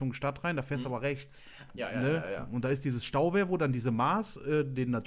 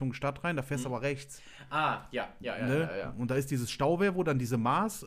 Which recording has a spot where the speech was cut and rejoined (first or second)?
first